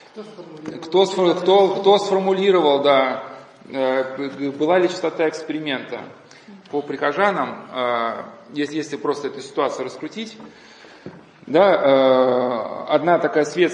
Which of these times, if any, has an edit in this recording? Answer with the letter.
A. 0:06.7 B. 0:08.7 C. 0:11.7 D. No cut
A